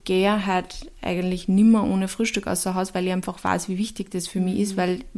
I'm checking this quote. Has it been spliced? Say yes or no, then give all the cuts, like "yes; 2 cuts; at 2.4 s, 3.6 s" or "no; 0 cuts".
no; 0 cuts